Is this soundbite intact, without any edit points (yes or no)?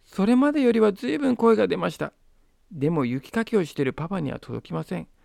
yes